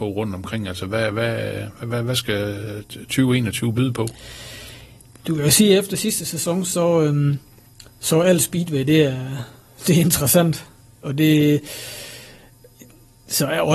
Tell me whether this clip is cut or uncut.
uncut